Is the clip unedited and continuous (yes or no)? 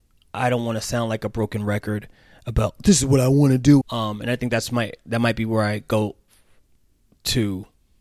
no